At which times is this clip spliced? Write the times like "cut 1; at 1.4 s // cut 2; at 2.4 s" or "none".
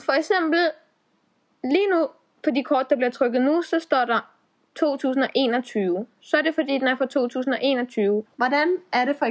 cut 1; at 8.2 s